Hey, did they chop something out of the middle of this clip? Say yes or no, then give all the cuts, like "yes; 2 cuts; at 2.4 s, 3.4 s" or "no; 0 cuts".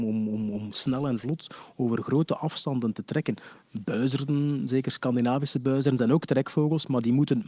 no; 0 cuts